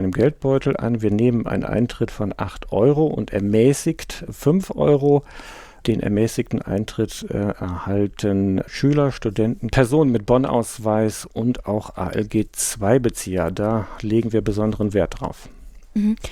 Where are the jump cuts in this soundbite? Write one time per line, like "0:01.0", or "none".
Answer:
0:09.7